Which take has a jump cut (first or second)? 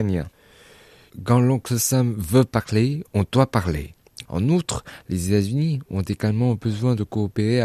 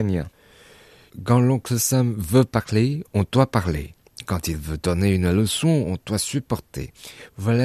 first